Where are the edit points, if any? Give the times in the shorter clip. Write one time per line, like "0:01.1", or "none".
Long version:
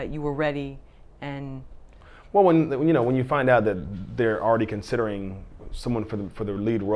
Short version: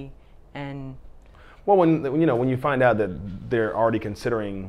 none

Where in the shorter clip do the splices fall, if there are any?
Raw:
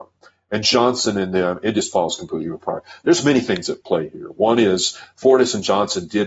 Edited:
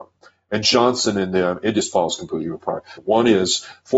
0:03.0

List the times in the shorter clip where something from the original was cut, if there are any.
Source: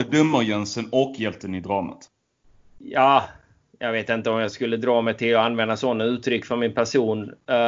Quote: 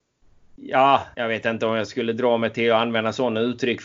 0:01.1

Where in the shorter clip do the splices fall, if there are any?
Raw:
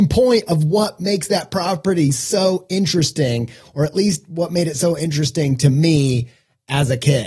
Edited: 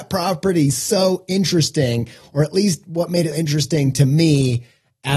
0:03.3

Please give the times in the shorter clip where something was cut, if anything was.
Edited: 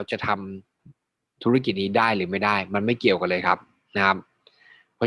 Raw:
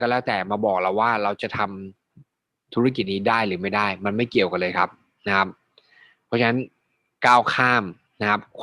none

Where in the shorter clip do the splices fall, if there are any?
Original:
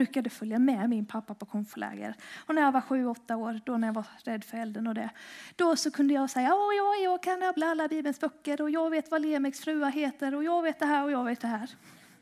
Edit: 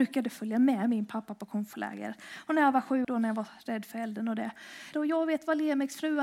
0:03.0
0:04.9

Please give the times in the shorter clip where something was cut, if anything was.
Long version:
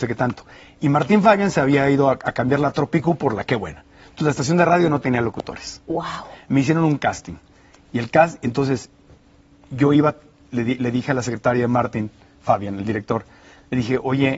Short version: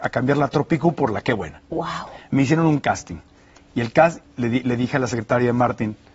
0:01.6
0:04.2

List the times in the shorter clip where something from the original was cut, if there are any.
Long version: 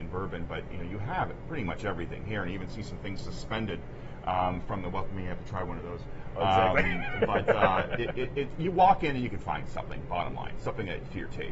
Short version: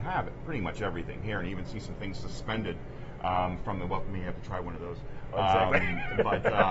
none

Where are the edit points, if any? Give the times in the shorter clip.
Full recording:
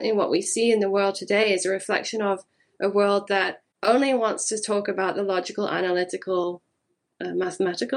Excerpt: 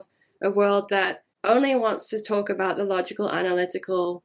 none

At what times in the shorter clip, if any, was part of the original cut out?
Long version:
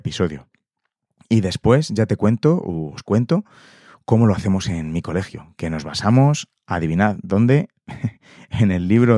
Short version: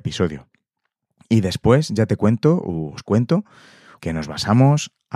0:04.0

